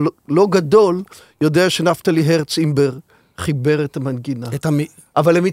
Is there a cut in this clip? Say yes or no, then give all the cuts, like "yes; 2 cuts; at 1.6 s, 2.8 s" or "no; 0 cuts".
no; 0 cuts